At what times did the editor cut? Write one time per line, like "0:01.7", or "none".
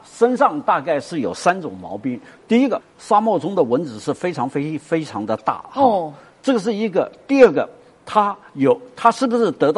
0:02.8

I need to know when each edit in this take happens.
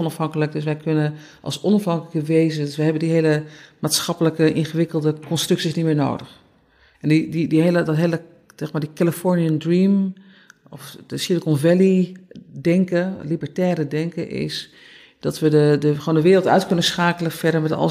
0:06.9

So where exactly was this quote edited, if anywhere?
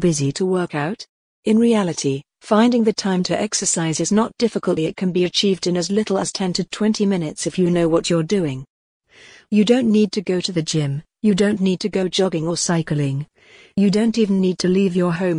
0:04.8

